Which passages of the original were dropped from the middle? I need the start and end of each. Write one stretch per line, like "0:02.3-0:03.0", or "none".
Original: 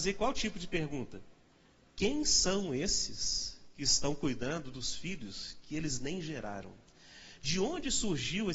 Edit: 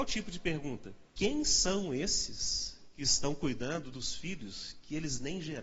0:01.4-0:01.9